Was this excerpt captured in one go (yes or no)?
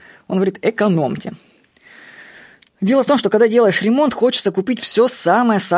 yes